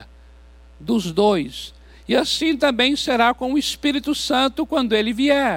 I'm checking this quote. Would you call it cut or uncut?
uncut